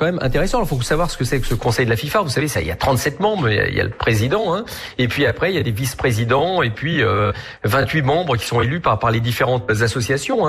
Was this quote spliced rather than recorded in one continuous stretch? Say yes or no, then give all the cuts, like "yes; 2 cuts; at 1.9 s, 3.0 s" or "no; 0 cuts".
no; 0 cuts